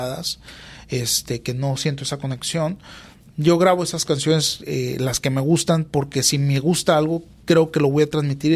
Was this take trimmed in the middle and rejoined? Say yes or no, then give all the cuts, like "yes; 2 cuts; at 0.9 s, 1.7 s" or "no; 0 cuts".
no; 0 cuts